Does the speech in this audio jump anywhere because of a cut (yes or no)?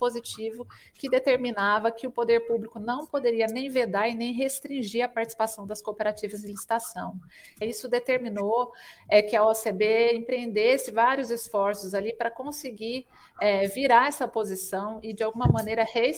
yes